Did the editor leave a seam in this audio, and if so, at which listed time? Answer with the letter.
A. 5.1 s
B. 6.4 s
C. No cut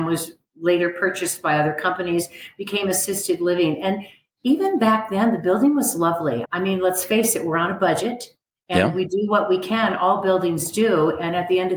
B